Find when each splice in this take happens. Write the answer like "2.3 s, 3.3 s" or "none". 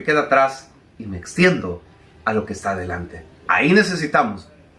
3.5 s